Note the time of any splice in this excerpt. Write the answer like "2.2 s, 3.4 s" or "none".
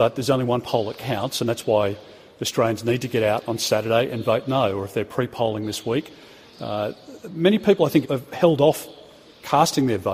8.0 s